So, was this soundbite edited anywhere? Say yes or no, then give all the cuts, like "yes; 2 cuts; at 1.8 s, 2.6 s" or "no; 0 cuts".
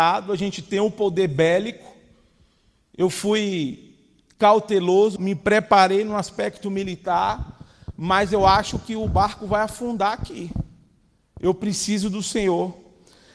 yes; 1 cut; at 5.2 s